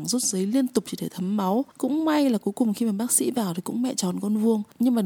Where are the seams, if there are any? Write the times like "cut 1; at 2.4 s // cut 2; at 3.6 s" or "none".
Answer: cut 1; at 1.7 s